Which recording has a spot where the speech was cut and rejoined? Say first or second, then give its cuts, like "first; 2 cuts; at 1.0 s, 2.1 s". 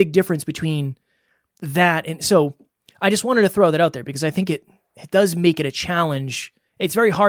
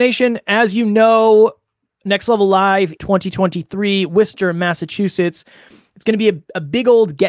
second; 1 cut; at 3.0 s